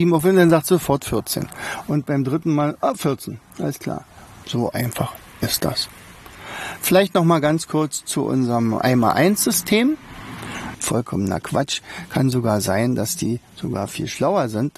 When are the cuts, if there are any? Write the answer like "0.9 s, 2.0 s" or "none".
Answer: 4.4 s, 10.7 s